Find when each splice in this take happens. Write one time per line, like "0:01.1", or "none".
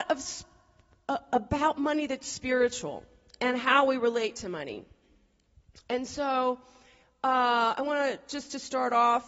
none